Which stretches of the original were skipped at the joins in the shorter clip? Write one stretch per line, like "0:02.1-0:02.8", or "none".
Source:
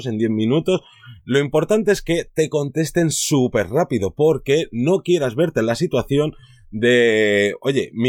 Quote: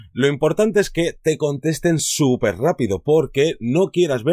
none